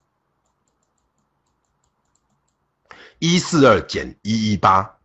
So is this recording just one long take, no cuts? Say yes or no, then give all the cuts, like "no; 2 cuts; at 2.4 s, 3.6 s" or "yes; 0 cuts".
yes; 0 cuts